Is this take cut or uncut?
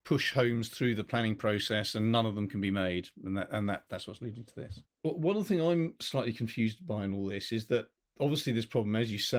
cut